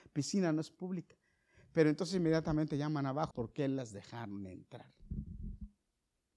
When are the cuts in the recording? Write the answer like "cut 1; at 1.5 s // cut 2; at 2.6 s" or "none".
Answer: cut 1; at 3.3 s